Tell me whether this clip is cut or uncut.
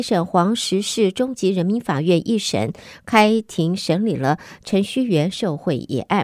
uncut